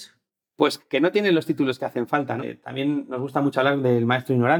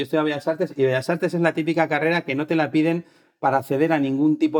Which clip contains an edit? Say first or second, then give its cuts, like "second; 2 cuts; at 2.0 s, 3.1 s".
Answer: first; 1 cut; at 2.4 s